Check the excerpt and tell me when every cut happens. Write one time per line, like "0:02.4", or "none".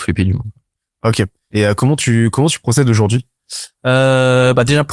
0:01.5